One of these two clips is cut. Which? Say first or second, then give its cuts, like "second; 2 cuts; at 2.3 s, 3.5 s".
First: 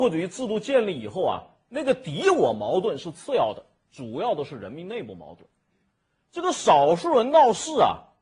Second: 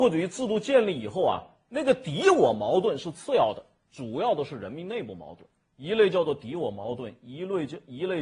second; 1 cut; at 5.7 s